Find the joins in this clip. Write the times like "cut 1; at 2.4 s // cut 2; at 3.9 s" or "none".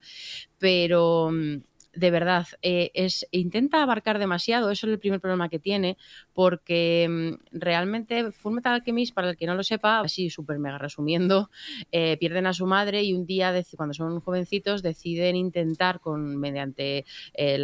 cut 1; at 10.0 s